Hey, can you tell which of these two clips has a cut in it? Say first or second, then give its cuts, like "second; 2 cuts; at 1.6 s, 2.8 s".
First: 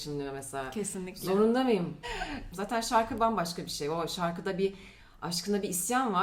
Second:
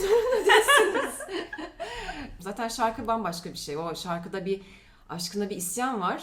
first; 1 cut; at 2.0 s